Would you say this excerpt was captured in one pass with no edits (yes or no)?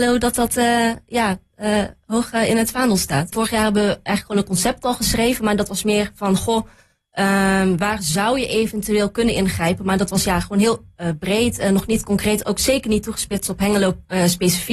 no